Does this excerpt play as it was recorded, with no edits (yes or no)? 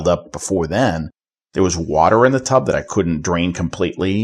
yes